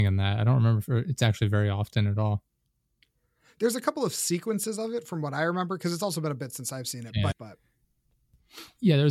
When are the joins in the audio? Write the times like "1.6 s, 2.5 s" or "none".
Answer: 7.3 s

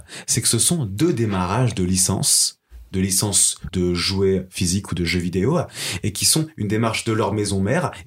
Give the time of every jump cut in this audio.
3.7 s

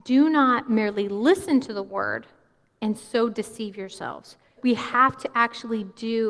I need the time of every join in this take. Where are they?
4.6 s

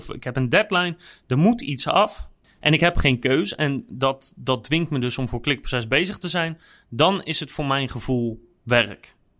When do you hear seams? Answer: none

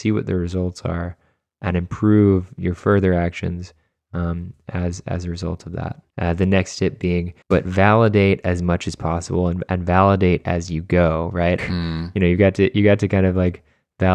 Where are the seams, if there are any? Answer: 6.1 s, 7.4 s, 11.6 s

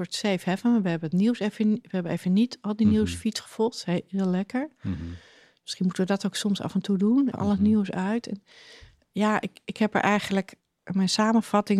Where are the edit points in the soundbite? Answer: 7.3 s

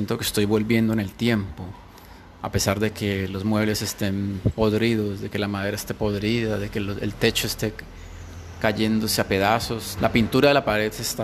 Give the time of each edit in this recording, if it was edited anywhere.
10.0 s

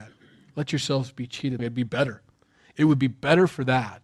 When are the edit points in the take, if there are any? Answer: 1.6 s

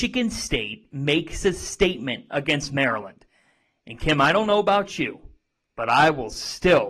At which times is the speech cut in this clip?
none

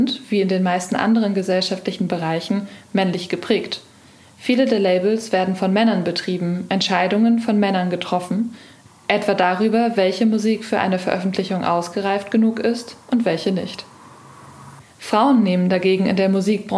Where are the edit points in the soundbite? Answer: none

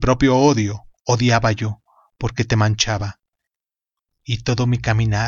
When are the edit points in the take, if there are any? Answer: 4.1 s

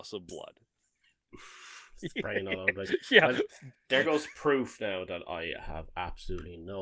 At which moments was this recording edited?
3.9 s

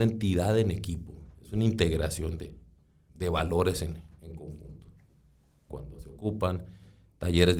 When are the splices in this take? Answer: 3.1 s, 5.7 s

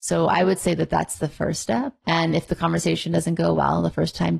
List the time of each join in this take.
2.0 s

